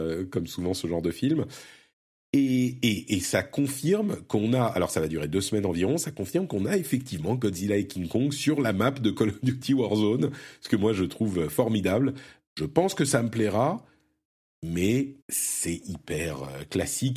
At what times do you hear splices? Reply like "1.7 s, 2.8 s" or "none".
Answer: 12.4 s, 15.2 s

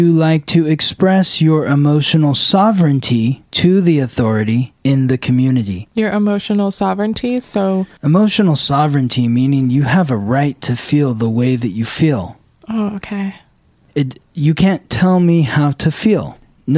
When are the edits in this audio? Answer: 5.9 s

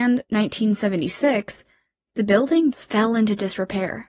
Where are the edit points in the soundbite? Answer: 2.7 s

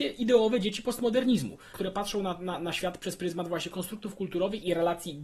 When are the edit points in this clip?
1.7 s

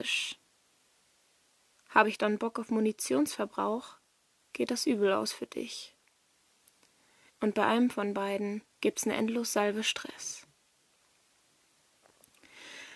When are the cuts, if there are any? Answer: 7.3 s, 8.7 s

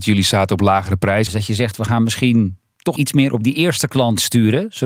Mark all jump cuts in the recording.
1.3 s, 3.0 s

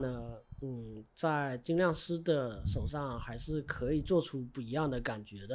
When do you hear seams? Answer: none

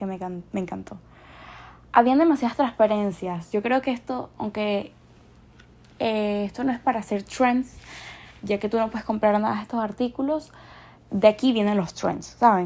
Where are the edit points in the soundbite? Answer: none

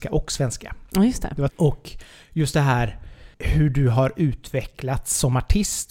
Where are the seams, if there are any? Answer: 1.5 s, 3.3 s

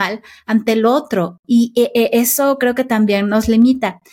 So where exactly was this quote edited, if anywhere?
none

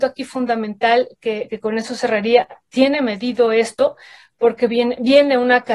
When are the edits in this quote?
1.5 s

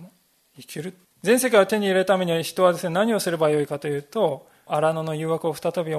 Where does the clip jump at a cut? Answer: 1.0 s, 4.7 s

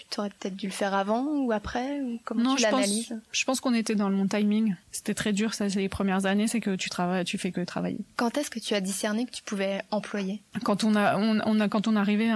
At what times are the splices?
4.8 s

